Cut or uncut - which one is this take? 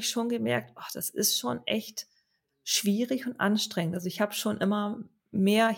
uncut